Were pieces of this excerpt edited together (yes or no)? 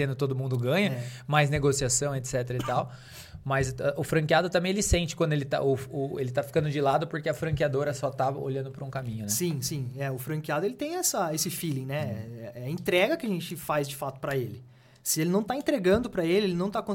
no